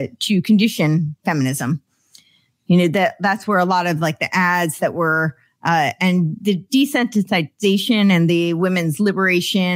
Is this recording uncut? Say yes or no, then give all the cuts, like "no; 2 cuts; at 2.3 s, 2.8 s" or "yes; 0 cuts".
yes; 0 cuts